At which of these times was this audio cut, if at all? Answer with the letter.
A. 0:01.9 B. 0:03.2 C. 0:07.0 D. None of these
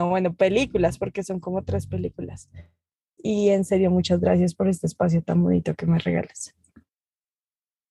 B